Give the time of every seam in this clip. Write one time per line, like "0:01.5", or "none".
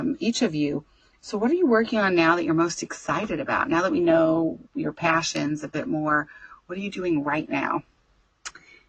none